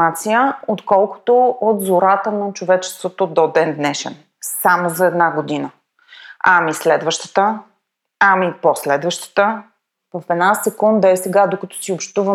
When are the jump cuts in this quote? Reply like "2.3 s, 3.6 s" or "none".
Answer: none